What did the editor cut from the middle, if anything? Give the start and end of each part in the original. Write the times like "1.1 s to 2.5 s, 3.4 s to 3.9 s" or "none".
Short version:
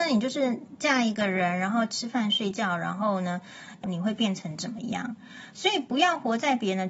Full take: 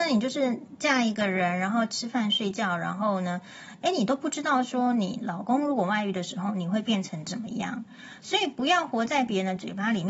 3.8 s to 6.5 s